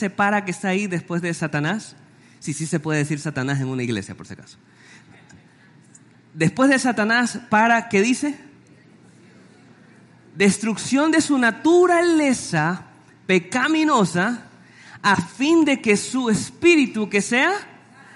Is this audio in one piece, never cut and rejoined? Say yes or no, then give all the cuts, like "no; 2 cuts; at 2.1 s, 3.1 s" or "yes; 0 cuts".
yes; 0 cuts